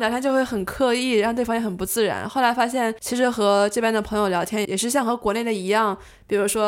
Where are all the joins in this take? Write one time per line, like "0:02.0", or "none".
0:04.6